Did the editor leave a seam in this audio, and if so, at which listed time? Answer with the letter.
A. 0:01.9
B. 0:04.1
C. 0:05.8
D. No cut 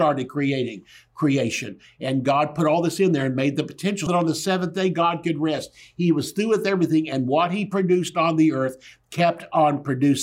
B